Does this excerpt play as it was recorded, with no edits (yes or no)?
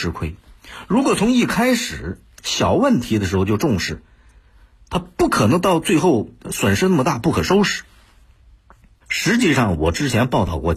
no